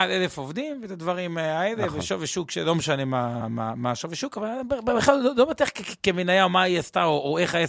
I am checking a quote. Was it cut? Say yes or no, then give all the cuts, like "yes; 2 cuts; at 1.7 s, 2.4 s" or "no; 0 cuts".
yes; 1 cut; at 3.4 s